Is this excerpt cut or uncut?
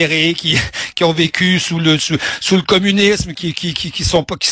cut